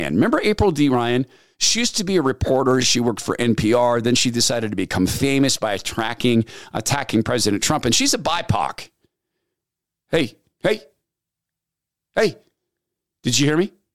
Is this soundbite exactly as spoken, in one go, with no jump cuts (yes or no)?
yes